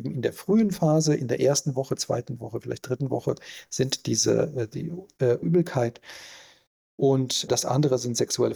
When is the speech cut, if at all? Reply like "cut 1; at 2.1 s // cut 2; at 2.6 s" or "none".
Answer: cut 1; at 5.4 s // cut 2; at 7.5 s